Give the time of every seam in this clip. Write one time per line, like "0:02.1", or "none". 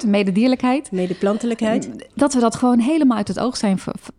none